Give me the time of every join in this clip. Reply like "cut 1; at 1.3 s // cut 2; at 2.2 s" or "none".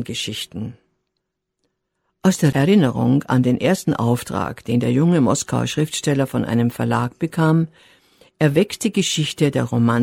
none